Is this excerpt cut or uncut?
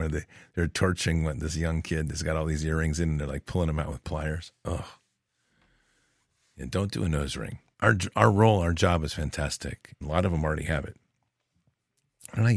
cut